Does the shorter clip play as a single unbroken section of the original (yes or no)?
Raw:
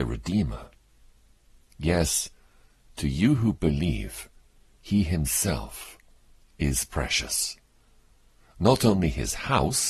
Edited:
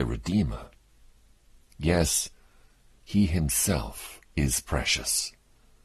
no